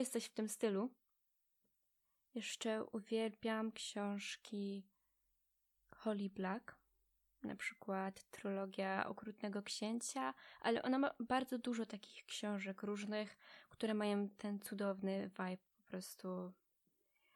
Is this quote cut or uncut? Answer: uncut